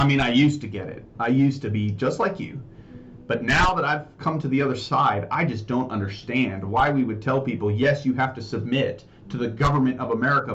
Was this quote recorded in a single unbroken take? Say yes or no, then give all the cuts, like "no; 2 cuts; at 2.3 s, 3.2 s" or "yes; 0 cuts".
yes; 0 cuts